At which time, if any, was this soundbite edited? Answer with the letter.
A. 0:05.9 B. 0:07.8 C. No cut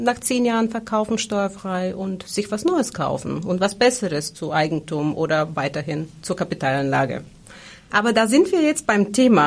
B